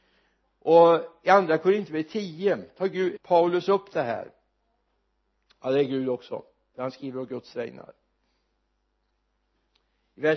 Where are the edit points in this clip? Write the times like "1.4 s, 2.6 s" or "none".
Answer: 3.2 s